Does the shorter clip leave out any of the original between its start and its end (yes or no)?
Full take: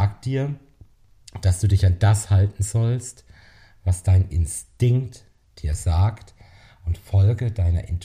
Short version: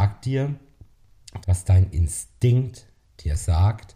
yes